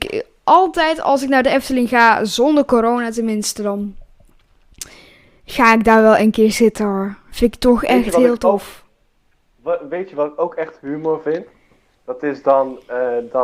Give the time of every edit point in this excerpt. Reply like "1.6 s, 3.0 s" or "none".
none

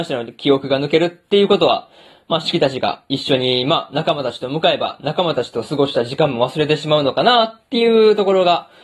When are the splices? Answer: none

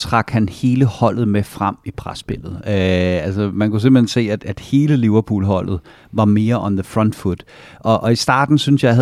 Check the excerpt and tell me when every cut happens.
4.4 s

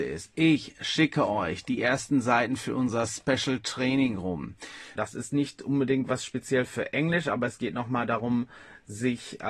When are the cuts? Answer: 5.0 s

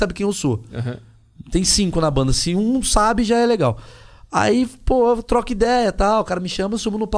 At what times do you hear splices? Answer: none

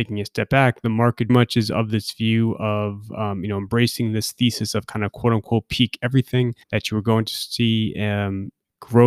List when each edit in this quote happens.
1.3 s, 6.6 s

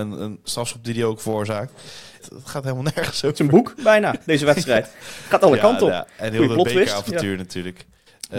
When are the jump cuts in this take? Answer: 2.2 s

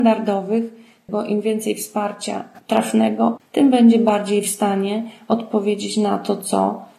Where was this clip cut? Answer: 1.0 s, 3.4 s

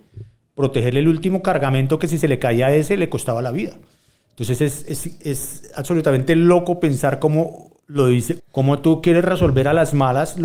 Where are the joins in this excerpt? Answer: 8.4 s

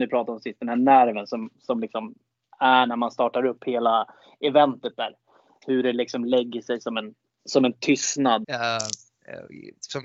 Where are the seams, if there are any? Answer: 8.4 s

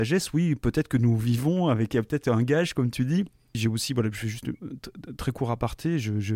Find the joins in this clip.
3.5 s

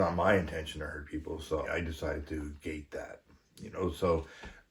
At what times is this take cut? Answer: 1.6 s

